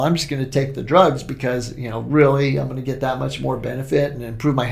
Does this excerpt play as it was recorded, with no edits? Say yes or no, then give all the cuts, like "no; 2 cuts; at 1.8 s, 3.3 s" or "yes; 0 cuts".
yes; 0 cuts